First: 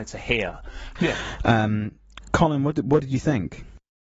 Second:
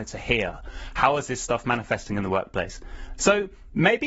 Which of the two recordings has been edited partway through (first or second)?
first